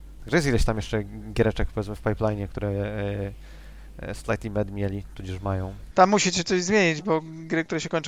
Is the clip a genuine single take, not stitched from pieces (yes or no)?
no